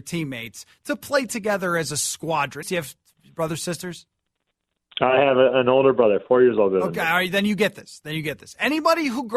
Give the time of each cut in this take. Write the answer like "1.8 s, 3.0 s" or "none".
2.6 s